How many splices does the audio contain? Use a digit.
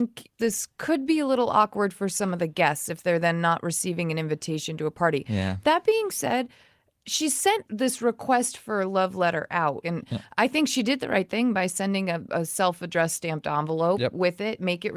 0